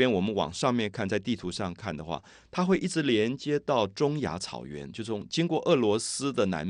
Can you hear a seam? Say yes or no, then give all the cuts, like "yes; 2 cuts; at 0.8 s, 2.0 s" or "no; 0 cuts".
no; 0 cuts